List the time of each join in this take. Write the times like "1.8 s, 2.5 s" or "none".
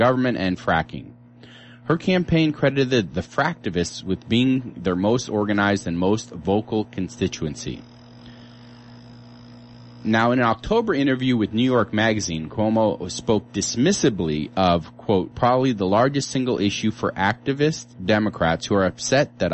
15.3 s, 17.9 s